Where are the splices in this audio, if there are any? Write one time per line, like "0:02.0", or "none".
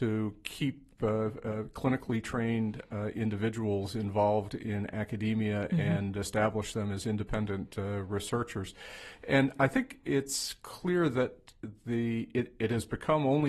none